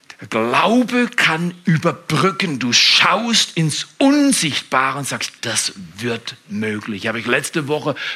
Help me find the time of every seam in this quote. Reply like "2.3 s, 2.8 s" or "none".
5.4 s